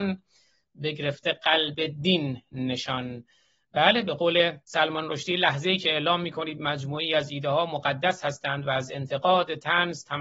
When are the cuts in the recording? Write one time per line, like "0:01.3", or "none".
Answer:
0:04.6